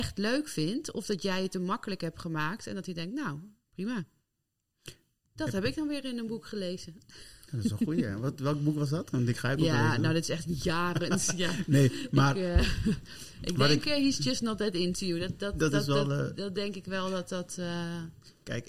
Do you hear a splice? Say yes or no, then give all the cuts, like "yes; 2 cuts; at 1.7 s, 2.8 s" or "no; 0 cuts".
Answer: no; 0 cuts